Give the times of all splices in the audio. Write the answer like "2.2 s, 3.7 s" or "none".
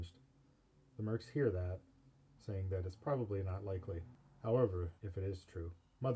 2.4 s, 5.0 s